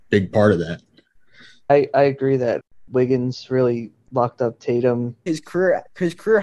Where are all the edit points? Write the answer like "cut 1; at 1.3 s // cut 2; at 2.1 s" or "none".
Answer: cut 1; at 5.3 s